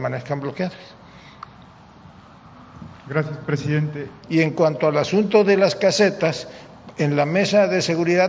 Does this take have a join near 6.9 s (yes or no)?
no